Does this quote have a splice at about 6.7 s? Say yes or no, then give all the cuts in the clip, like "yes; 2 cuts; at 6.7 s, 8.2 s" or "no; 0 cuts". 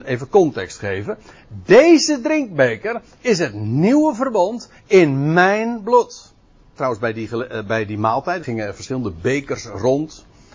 yes; 2 cuts; at 6.7 s, 8.4 s